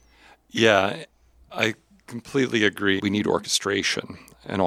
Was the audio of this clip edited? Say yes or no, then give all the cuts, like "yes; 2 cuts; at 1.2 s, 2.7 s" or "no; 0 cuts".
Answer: yes; 1 cut; at 3.0 s